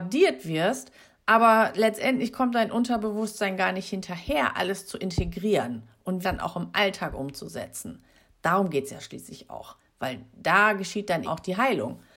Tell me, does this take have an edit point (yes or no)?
yes